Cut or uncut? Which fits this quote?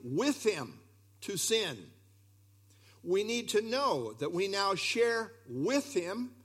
uncut